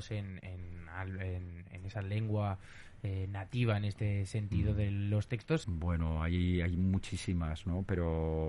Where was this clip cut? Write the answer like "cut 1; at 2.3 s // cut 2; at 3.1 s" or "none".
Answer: cut 1; at 5.6 s